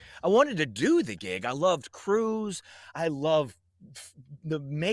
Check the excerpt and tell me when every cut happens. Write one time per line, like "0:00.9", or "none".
0:02.9